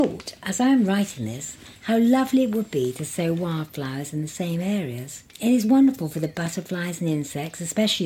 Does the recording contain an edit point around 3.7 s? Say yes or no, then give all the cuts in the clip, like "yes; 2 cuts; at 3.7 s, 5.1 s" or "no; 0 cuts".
no; 1 cut; at 5.3 s